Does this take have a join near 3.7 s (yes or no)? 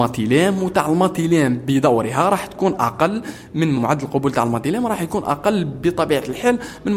yes